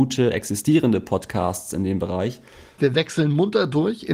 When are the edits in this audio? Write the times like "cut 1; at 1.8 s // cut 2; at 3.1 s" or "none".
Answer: cut 1; at 2.8 s